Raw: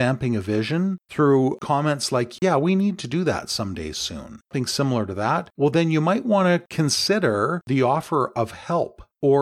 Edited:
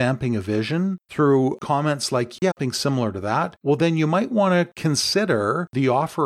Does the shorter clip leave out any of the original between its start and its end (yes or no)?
yes